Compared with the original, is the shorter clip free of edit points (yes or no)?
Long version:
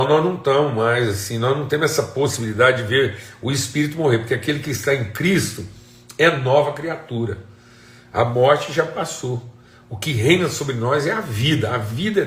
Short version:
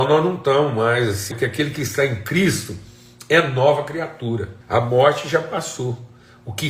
no